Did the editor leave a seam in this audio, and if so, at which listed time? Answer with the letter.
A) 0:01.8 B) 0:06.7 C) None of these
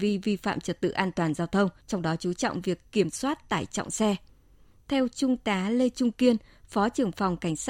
A